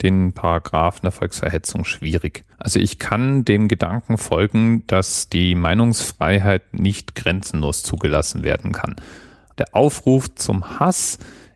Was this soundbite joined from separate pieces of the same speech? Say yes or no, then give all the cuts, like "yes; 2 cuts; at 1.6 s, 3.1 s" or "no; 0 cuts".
yes; 2 cuts; at 2.5 s, 9.5 s